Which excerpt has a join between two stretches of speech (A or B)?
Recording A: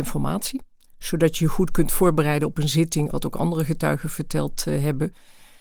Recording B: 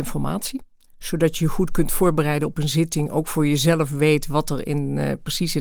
A